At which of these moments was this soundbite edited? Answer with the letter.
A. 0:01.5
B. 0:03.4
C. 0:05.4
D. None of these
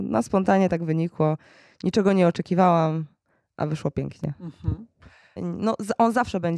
C